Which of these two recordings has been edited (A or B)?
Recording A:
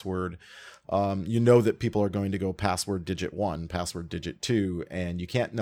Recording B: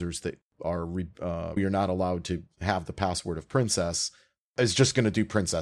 B